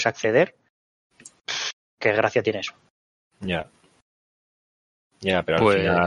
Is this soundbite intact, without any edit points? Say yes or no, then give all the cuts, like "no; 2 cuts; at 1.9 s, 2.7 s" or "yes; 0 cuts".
yes; 0 cuts